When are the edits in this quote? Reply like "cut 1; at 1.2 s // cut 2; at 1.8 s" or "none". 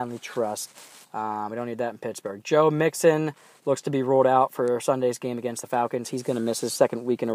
cut 1; at 1.0 s